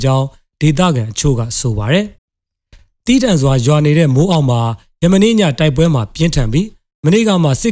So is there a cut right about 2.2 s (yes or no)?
yes